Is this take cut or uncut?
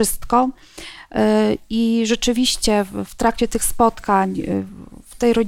uncut